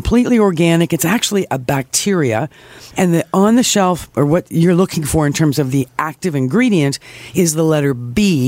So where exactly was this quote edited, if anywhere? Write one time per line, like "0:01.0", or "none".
0:02.9